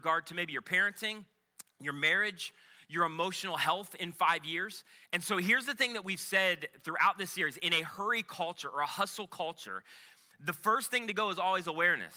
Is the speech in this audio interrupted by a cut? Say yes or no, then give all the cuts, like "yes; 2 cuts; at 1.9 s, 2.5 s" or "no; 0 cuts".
yes; 1 cut; at 5.1 s